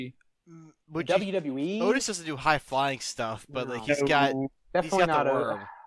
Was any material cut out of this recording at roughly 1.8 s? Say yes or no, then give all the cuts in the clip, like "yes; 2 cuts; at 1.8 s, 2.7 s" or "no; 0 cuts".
no; 0 cuts